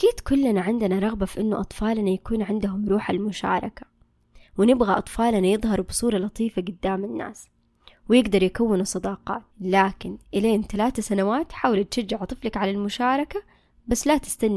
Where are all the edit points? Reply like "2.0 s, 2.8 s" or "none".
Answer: 9.5 s